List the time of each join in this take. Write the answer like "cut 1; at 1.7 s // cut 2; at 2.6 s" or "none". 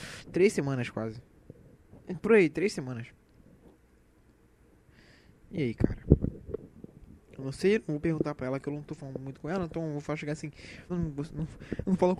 cut 1; at 10.9 s